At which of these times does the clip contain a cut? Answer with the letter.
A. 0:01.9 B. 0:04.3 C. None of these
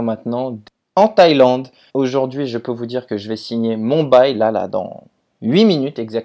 A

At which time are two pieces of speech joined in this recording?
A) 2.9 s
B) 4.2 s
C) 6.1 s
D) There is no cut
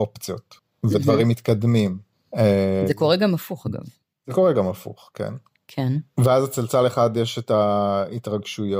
C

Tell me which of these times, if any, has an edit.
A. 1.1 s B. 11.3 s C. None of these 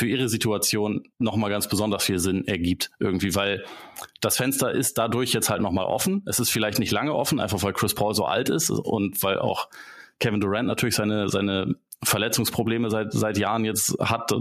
A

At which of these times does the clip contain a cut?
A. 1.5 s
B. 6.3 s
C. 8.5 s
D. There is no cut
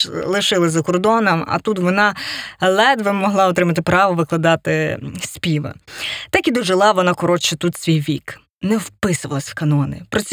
C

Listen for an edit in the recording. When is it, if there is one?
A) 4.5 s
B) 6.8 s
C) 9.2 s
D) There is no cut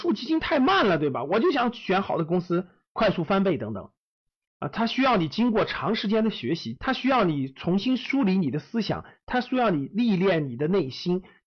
A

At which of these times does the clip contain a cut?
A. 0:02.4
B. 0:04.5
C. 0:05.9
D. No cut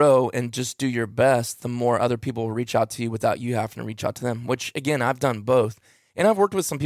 D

